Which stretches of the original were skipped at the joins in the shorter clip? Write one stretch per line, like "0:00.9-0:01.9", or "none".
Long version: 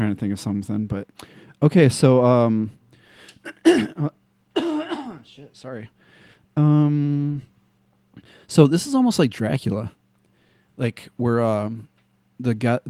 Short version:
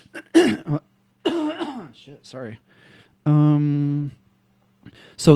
none